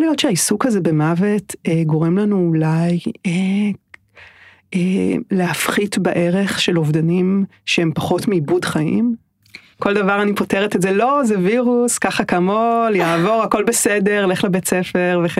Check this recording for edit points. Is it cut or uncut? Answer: cut